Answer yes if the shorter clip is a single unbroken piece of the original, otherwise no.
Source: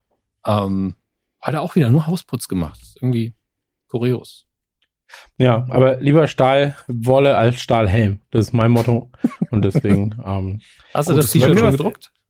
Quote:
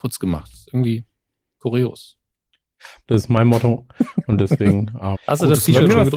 no